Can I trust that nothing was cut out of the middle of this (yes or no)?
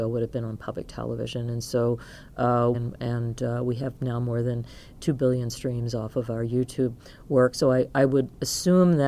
no